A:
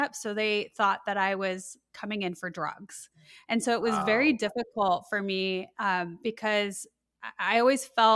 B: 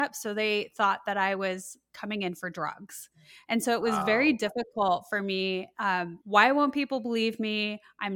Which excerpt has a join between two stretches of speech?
B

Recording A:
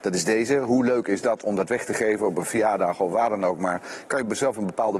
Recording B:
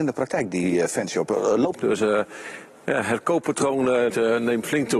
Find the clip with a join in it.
B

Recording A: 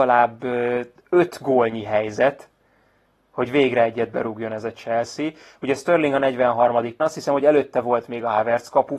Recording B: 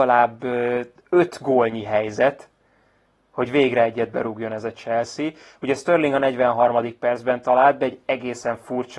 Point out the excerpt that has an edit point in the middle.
A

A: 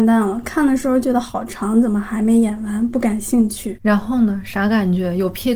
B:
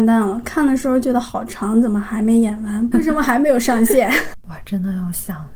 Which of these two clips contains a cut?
B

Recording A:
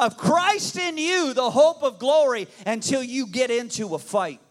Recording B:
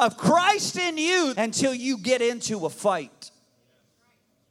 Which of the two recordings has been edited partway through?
B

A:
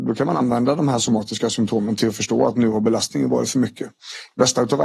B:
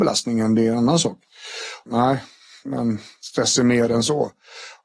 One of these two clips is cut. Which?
B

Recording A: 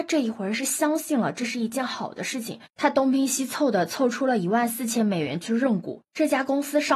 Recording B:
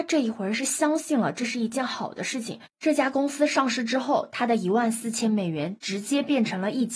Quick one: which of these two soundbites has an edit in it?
B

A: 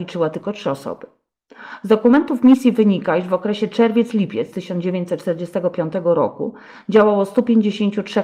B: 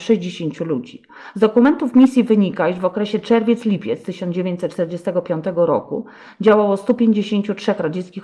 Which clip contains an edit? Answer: B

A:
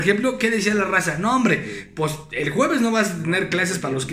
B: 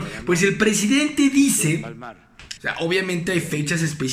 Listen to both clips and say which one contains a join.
B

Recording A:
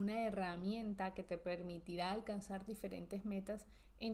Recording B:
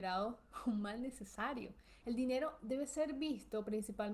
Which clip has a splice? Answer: B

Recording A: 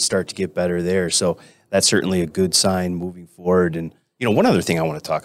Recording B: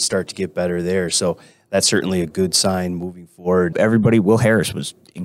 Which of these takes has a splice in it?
B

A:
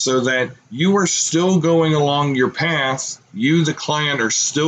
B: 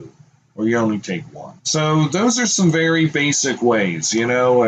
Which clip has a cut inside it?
B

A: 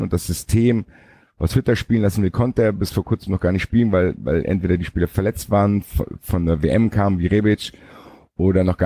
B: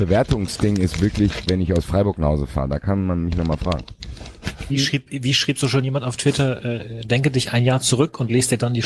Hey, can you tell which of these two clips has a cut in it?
B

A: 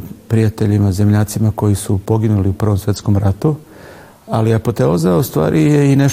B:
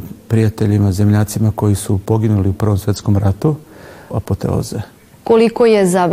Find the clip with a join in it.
B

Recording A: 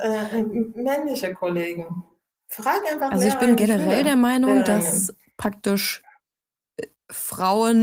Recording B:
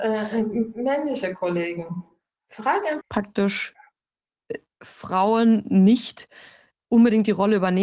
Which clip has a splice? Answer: B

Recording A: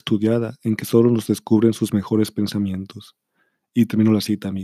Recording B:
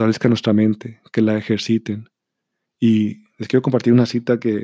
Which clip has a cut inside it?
B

